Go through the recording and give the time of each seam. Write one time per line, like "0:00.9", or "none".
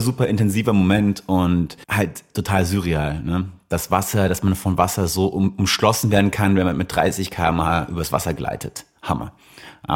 0:01.8

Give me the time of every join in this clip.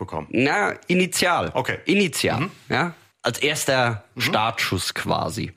0:03.1

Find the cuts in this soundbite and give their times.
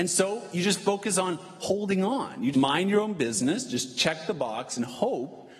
0:02.5

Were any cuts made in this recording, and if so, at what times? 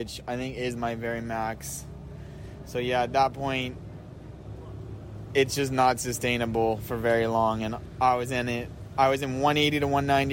none

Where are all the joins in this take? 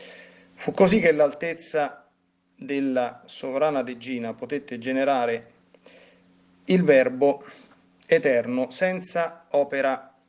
none

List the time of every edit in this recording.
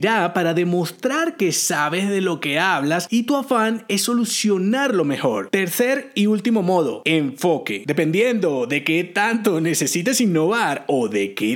none

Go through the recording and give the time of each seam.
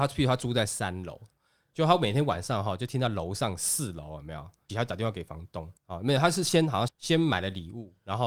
0:04.7
0:05.8
0:06.9

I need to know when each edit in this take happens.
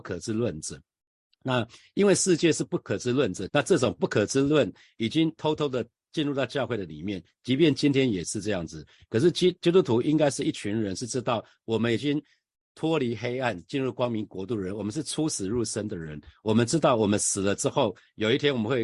0:03.5

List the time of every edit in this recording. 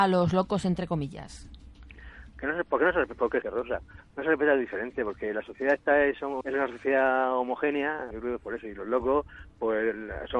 0:03.4
0:06.4
0:08.1

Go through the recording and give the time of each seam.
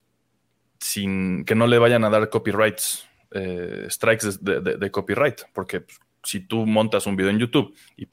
none

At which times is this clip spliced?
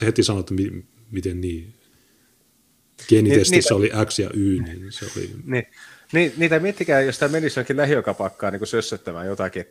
none

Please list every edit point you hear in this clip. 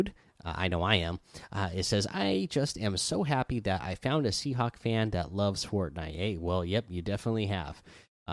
none

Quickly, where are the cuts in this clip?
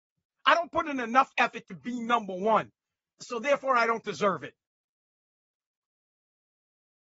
none

